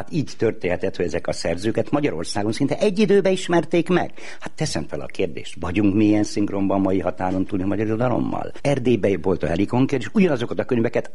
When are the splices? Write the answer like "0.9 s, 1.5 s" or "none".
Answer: 8.6 s